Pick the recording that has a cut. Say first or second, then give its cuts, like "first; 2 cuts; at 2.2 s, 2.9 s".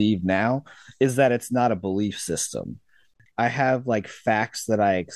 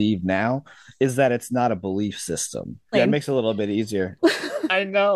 second; 2 cuts; at 2.9 s, 4.2 s